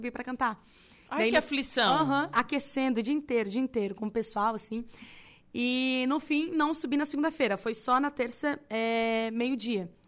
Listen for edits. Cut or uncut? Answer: uncut